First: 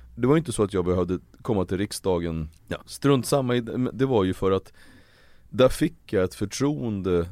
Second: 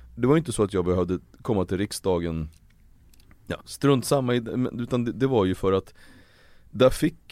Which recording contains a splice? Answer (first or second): first